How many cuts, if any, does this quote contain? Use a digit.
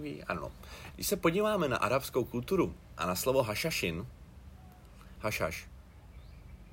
2